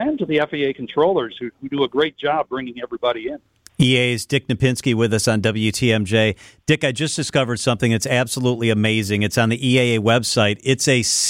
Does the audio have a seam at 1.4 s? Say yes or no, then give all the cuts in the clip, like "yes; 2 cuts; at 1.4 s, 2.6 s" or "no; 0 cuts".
no; 0 cuts